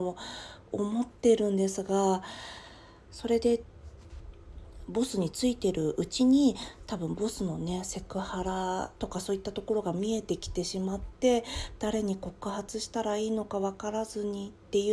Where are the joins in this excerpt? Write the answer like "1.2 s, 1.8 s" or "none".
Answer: 3.1 s, 9.0 s